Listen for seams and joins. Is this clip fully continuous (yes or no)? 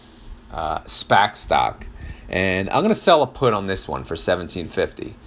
yes